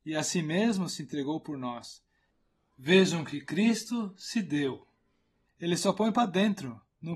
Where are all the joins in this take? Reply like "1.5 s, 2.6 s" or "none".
5.4 s